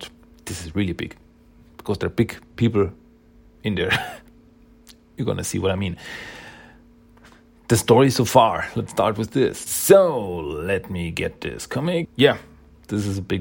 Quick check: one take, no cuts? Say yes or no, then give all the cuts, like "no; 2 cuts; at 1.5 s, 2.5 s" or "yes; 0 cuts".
no; 2 cuts; at 9.7 s, 12.1 s